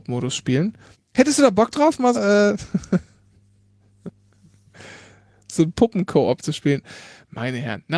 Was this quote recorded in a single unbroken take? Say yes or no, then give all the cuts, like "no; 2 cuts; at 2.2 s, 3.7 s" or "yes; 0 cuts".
no; 2 cuts; at 0.9 s, 2.1 s